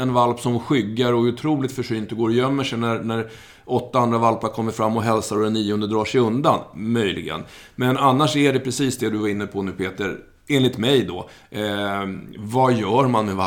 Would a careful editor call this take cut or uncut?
uncut